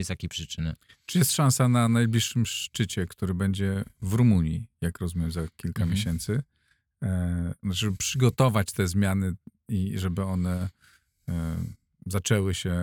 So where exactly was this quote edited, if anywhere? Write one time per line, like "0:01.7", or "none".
0:07.6